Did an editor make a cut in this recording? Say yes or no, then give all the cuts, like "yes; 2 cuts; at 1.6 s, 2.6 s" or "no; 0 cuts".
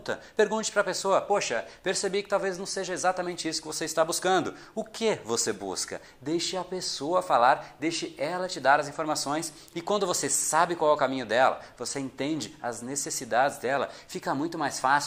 yes; 1 cut; at 9.7 s